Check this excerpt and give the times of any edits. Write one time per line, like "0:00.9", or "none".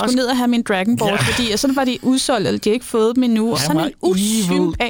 0:03.5